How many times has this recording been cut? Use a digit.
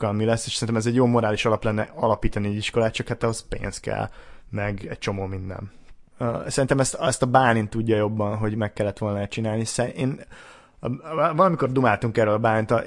1